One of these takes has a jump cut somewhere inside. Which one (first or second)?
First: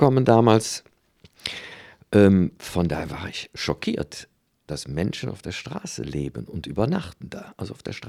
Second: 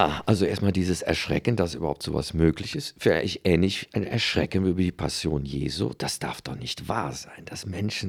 first